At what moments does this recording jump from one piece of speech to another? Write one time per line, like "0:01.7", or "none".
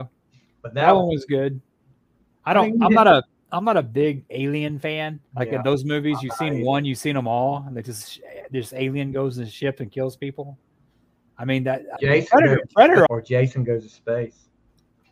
0:05.3
0:12.0
0:13.1